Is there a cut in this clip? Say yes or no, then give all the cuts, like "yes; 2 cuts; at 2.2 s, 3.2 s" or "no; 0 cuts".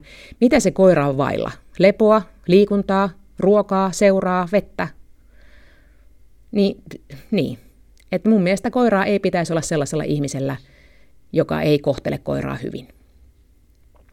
no; 0 cuts